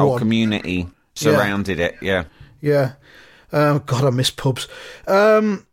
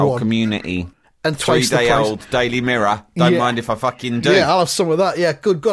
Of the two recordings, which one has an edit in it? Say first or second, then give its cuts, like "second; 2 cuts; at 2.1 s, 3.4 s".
second; 1 cut; at 1.0 s